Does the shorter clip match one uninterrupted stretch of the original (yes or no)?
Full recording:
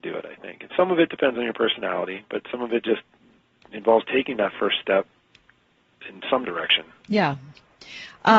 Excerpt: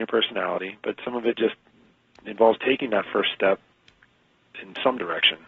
yes